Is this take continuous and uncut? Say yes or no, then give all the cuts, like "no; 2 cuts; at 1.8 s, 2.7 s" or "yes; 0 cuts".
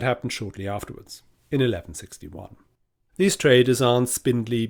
no; 1 cut; at 3.1 s